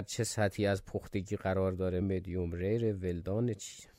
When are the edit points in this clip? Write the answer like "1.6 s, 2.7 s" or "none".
2.0 s

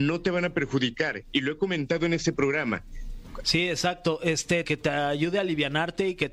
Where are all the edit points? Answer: 3.4 s, 4.6 s

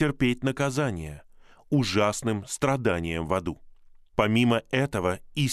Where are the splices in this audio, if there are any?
4.1 s

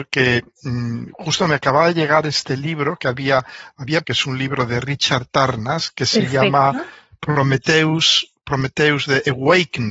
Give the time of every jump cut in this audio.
4.0 s

